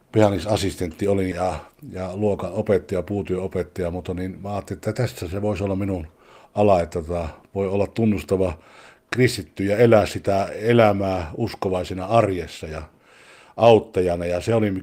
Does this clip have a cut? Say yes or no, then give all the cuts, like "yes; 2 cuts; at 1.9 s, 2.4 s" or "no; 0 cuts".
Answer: yes; 1 cut; at 1.3 s